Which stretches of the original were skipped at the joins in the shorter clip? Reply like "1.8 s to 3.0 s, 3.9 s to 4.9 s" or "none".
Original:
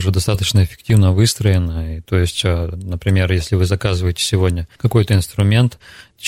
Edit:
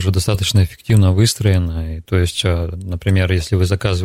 none